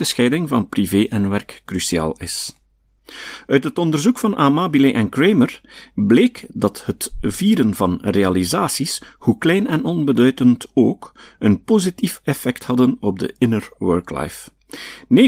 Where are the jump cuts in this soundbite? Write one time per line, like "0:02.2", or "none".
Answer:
none